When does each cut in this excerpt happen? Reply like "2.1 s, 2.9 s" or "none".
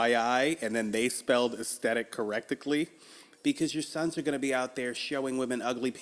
3.4 s